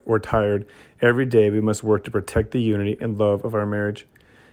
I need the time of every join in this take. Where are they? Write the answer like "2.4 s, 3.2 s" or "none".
3.0 s